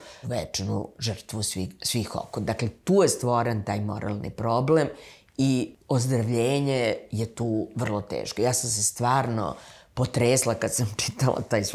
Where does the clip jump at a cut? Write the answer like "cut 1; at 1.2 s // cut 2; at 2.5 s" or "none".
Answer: none